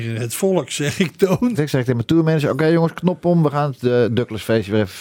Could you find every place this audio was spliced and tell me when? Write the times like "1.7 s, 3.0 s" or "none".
1.5 s